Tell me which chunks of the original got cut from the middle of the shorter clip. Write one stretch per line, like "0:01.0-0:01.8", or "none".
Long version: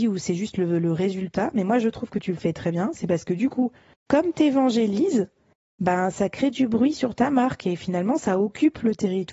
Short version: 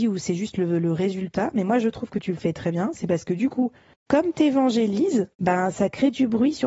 0:05.3-0:05.7